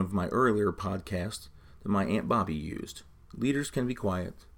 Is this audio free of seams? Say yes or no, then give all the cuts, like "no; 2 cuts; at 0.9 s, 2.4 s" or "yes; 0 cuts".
no; 1 cut; at 3.3 s